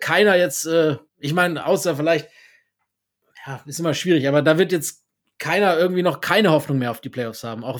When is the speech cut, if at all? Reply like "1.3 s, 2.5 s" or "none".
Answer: 1.1 s